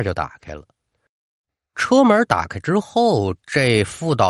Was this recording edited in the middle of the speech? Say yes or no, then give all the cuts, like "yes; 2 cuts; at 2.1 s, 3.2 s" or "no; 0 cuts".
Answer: no; 0 cuts